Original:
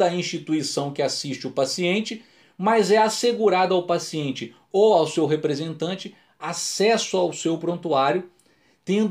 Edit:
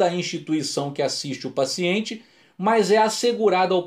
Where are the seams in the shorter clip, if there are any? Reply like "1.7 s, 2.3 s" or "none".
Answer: none